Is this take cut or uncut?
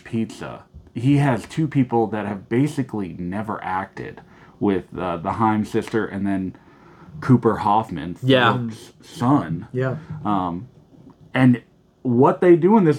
uncut